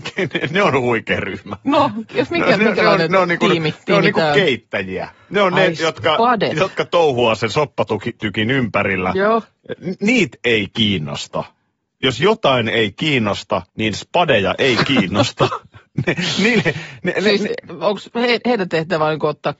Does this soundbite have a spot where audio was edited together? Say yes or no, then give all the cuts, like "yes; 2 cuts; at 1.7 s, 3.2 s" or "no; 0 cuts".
yes; 1 cut; at 13.7 s